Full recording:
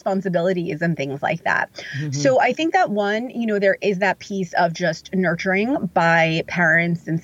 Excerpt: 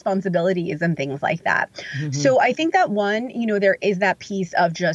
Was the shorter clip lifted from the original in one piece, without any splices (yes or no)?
yes